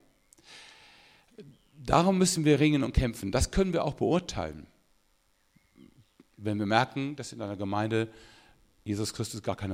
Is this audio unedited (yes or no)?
yes